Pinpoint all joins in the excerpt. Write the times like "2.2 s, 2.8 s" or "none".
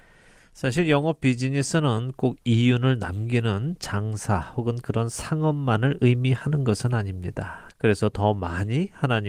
7.7 s